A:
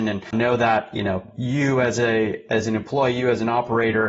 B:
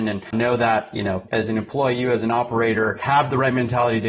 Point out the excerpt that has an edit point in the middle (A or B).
B